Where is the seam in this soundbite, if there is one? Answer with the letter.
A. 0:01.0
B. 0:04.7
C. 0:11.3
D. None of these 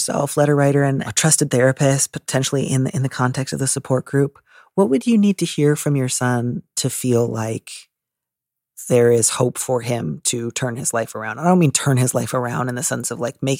A